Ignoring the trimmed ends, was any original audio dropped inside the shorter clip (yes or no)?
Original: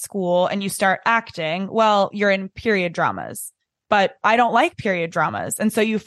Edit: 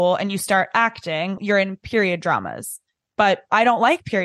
yes